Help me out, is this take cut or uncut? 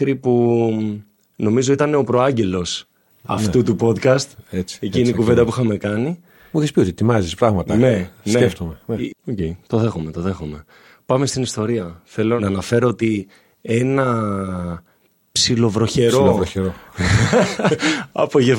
cut